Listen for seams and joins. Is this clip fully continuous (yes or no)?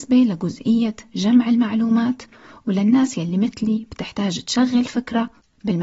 yes